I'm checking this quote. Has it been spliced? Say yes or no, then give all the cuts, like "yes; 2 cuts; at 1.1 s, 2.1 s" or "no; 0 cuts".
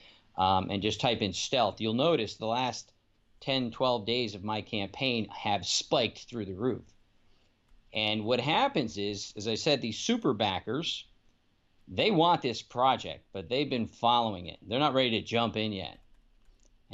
no; 0 cuts